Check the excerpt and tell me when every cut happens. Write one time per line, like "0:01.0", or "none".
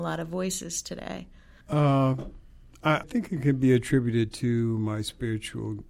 0:01.6
0:03.0

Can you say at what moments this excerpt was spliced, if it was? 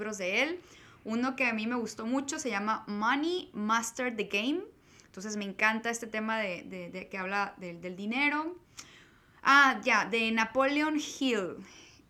none

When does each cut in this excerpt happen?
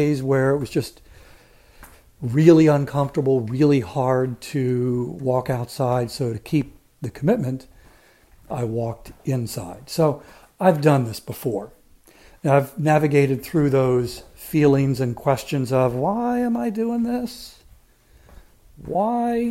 none

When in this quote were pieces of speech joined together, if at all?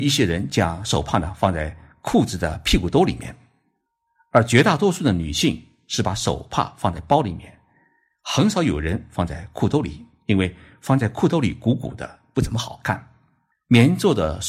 0:13.5

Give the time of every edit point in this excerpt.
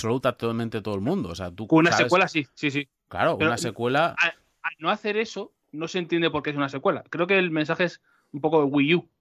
none

